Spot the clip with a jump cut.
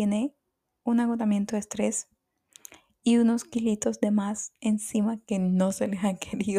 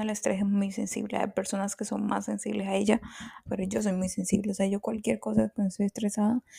second; 1 cut; at 3.5 s

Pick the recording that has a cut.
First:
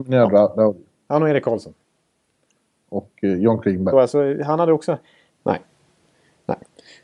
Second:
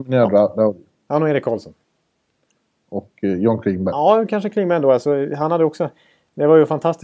first; 2 cuts; at 3.9 s, 5.3 s

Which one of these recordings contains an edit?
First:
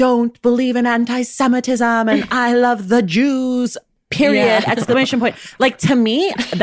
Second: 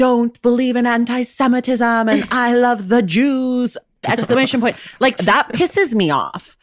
second; 2 cuts; at 4.0 s, 5.2 s

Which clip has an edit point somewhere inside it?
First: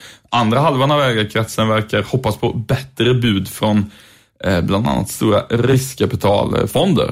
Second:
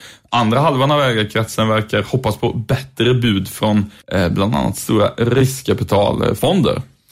second; 1 cut; at 4.0 s

